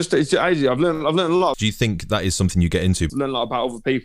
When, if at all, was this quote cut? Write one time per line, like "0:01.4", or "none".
0:01.5
0:03.1